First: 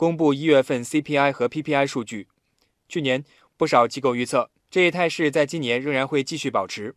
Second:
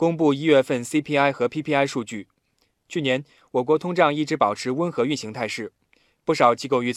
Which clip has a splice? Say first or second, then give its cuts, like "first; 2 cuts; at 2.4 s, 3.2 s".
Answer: first; 1 cut; at 3.5 s